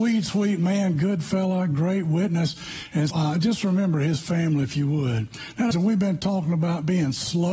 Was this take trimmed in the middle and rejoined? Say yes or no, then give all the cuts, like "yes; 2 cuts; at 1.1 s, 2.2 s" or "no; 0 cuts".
yes; 2 cuts; at 3.1 s, 5.7 s